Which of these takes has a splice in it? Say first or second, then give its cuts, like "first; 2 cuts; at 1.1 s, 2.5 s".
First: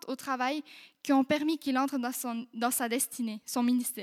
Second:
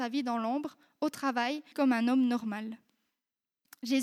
second; 1 cut; at 1.7 s